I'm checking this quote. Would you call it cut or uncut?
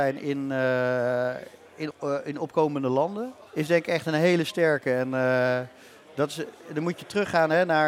cut